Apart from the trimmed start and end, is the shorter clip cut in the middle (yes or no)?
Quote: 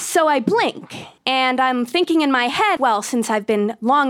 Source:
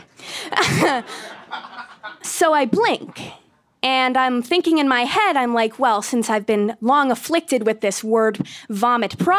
yes